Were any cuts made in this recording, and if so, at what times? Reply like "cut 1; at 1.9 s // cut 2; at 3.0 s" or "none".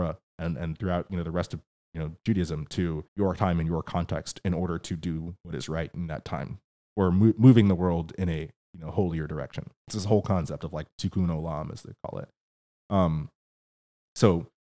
cut 1; at 3.1 s // cut 2; at 9.8 s